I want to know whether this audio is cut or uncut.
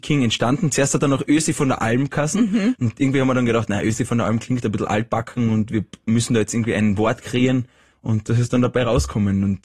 cut